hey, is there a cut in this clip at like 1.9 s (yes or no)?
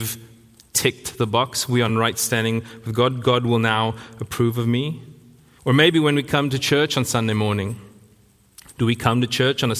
yes